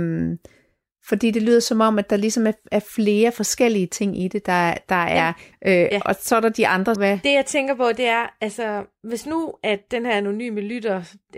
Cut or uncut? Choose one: cut